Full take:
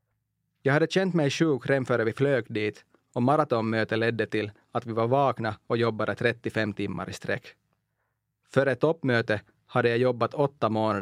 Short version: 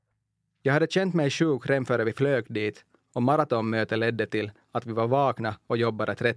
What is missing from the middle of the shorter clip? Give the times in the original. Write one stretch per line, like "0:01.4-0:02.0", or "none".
none